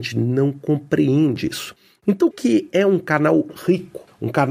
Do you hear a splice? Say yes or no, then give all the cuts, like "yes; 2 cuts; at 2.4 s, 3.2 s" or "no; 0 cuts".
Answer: yes; 1 cut; at 2.3 s